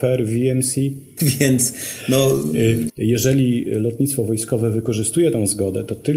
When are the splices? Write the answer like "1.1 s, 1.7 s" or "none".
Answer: 1.2 s, 2.9 s